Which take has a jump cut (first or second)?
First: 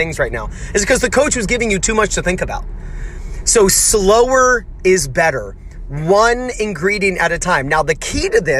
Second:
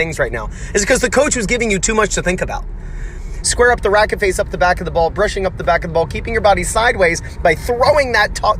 second